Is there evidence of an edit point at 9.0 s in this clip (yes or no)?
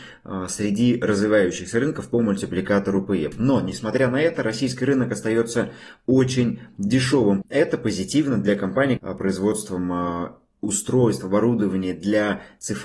yes